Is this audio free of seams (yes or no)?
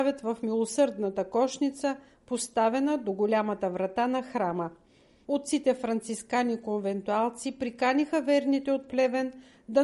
no